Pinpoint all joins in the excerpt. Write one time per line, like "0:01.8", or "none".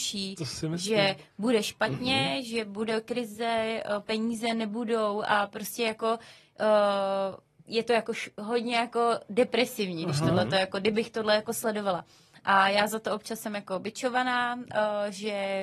none